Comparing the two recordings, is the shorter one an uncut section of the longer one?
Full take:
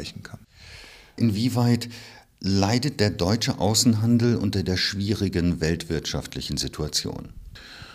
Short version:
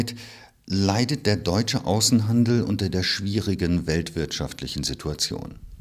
yes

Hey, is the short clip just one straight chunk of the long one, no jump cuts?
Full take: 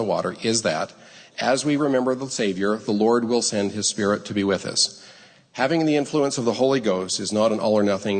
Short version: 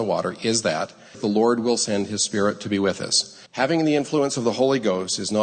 no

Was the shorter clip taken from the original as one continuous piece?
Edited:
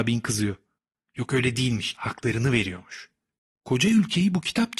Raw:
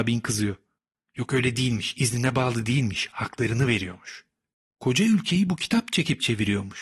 no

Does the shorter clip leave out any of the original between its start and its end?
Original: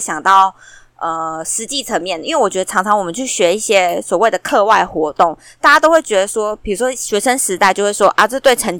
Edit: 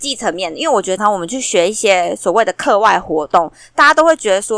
yes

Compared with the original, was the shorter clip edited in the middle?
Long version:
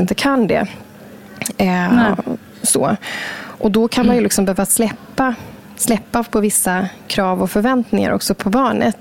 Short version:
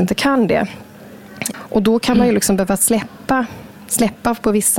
yes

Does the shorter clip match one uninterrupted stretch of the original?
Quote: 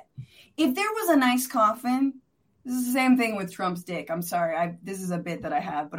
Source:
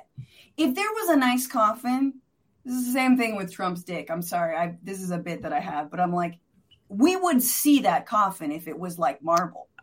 yes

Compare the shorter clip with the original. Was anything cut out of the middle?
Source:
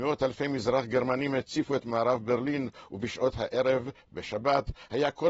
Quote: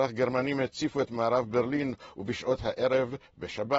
no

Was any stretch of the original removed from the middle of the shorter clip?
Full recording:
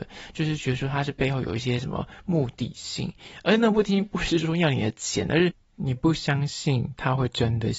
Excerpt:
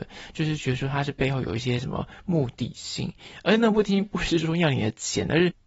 no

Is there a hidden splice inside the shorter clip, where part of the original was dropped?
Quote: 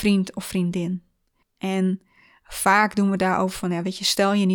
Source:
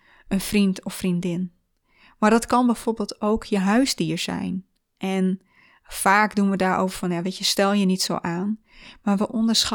yes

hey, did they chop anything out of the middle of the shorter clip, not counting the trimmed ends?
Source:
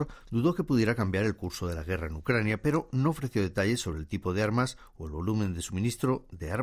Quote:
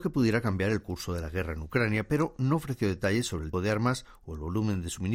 yes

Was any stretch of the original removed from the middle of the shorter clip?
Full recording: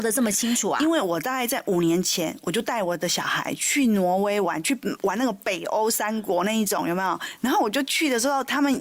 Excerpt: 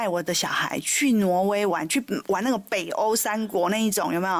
no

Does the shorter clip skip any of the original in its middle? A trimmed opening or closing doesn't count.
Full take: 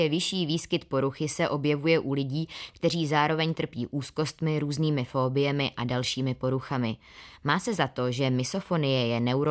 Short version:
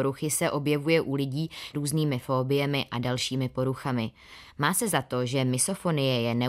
yes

